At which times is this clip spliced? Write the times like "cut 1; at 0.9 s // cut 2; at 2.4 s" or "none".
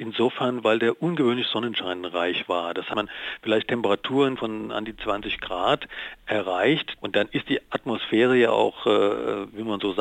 cut 1; at 4.4 s // cut 2; at 7.0 s